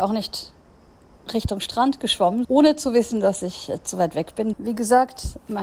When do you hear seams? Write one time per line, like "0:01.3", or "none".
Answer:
0:02.4
0:04.5